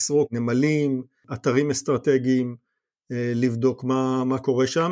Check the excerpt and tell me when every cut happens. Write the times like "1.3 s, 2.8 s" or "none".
none